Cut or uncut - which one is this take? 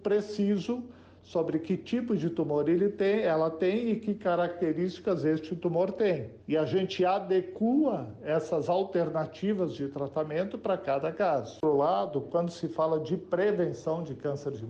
cut